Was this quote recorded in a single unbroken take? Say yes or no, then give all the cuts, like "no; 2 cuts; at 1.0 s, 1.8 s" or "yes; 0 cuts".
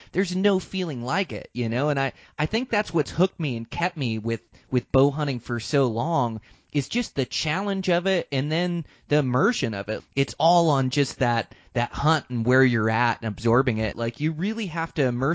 no; 2 cuts; at 10.0 s, 13.9 s